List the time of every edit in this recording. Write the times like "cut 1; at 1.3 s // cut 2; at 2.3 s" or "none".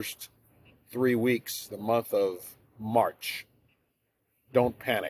none